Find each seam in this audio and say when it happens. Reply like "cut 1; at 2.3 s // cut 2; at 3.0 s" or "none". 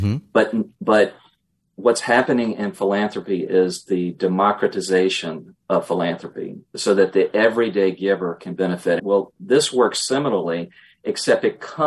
cut 1; at 9.0 s